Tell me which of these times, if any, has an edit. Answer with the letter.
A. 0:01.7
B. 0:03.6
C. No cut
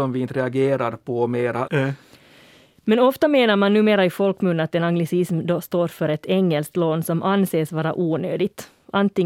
A